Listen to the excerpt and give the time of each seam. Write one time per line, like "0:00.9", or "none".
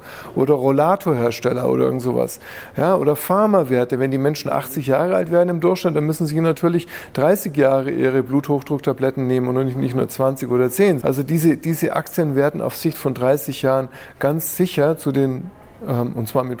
0:11.0

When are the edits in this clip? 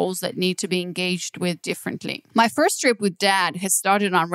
0:02.3

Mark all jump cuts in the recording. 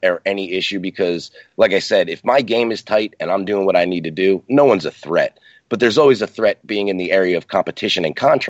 none

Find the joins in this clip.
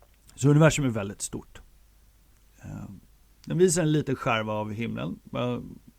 0:03.4

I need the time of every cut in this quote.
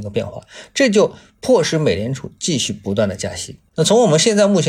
0:03.7

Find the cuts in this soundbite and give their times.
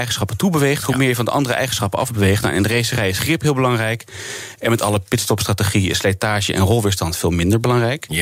none

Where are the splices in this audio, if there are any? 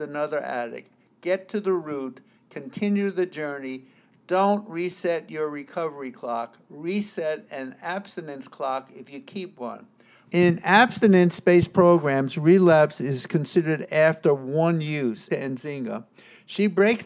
0:10.3
0:15.3

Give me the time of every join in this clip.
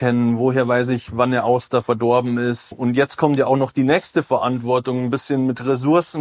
0:02.7

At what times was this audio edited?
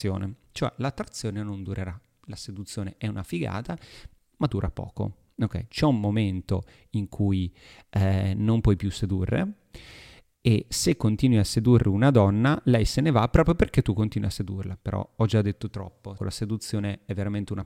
0:16.2

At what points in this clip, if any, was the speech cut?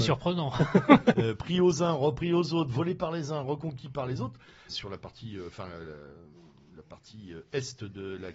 0:01.1
0:04.7

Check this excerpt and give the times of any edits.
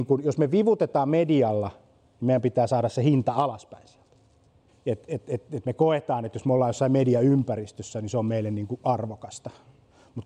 0:04.7

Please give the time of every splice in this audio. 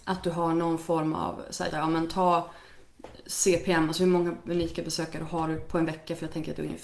0:01.7

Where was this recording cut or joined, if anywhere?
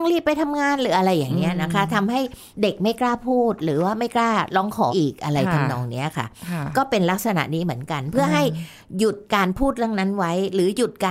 0:04.9
0:09.3

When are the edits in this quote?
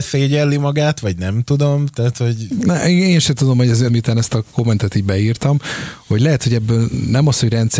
0:02.6
0:03.9

